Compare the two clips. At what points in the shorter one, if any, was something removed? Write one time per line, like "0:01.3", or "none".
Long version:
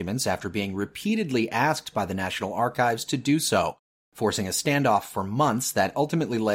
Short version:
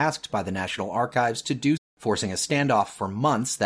0:01.8